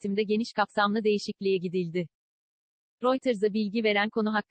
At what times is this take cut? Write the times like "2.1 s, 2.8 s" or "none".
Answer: 3.0 s